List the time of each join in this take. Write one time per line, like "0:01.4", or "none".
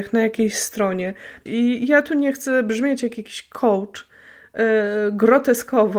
0:01.5

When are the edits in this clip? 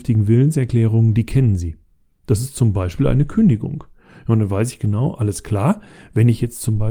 none

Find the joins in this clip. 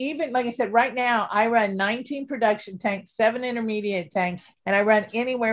0:04.5

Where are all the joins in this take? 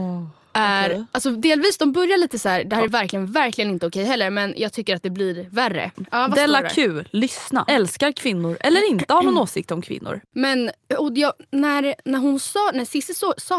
0:02.9
0:05.9
0:07.7

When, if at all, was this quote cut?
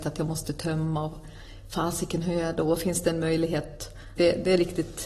0:04.2

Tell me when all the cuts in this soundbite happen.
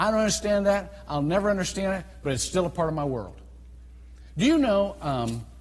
none

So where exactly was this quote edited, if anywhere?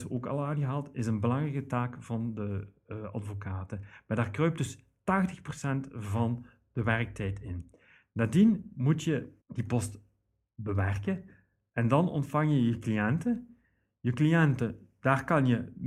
0:09.4
0:11.7

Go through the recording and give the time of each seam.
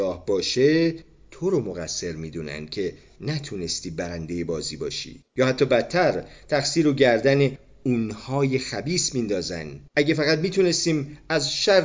0:05.3
0:09.9

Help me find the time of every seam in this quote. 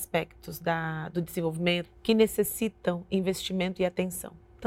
0:01.8

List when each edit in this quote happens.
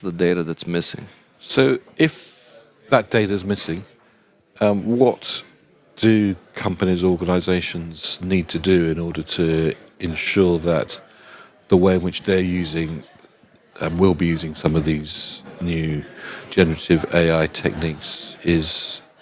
none

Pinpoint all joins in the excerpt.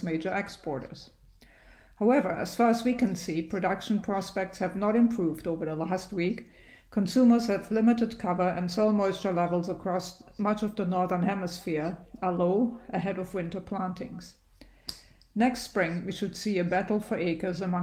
none

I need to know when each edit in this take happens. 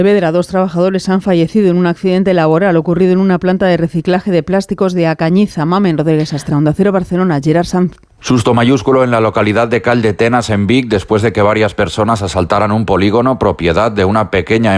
0:06.5

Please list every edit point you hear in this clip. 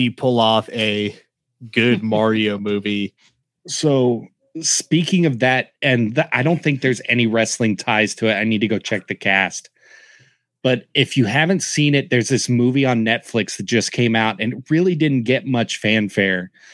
none

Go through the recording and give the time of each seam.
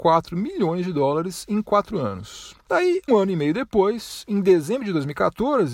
0:03.1

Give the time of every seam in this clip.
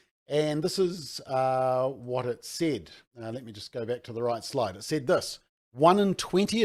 none

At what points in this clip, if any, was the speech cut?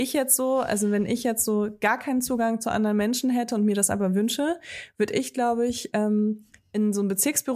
none

